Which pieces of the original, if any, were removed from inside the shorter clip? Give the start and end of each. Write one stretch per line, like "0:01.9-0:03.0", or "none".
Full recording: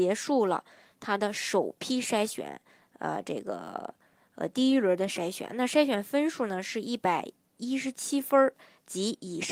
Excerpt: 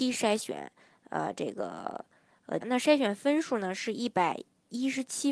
0:04.5-0:05.5

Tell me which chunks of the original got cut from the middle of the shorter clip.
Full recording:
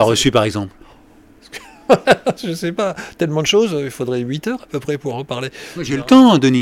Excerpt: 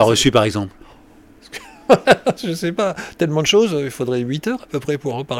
none

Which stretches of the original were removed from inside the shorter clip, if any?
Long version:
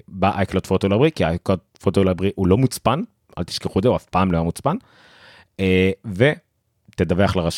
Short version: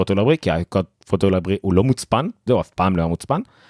0:03.2-0:03.8

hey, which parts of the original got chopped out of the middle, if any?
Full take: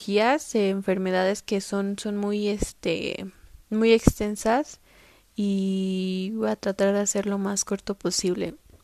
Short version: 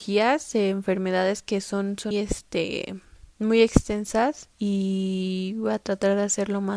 0:02.1-0:02.4
0:04.8-0:05.3

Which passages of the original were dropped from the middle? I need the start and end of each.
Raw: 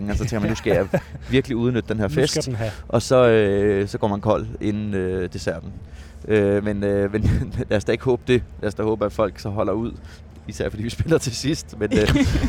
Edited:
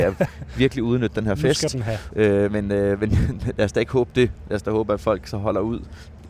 0:02.8-0:06.2

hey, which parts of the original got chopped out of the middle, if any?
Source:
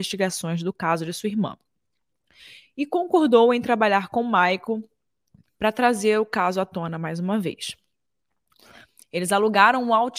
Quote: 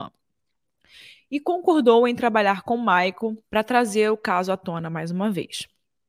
0:04.9-0:05.5

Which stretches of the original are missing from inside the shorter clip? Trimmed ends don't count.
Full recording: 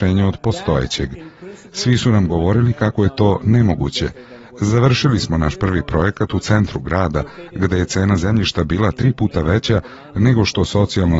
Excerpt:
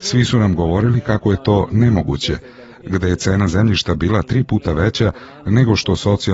0:04.5-0:07.5

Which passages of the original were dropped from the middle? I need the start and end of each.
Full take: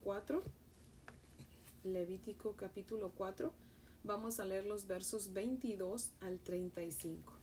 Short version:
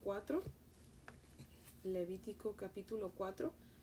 none

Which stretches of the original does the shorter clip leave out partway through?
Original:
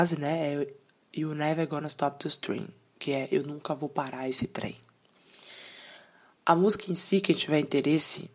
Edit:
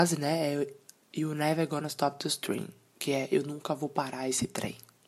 none

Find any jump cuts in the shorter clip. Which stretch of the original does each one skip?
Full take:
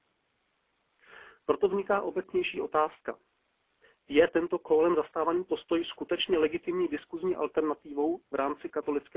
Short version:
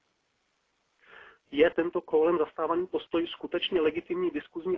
0:01.3-0:03.9

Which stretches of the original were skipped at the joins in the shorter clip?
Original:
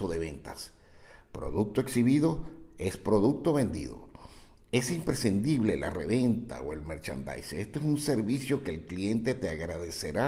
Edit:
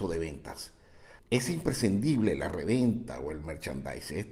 0:01.2-0:04.6

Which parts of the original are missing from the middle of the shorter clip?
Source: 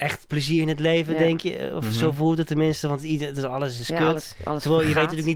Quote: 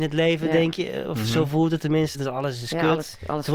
0:02.8-0:03.3

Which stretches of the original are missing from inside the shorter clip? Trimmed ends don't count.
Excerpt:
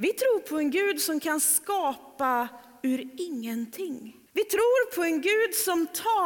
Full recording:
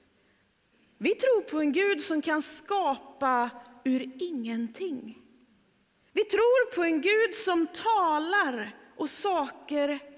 0:05.3-0:06.1

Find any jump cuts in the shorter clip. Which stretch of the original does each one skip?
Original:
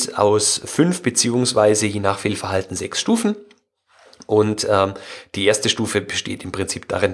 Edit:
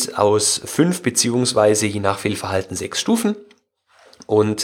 none

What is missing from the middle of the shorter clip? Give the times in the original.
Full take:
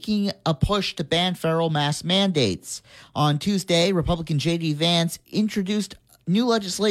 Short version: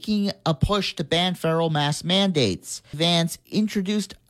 0:02.9-0:04.7

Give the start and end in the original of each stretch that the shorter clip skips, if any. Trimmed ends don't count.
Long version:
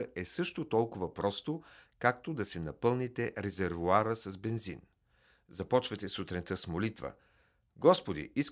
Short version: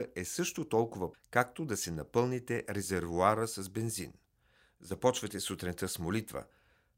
0:01.1-0:01.8

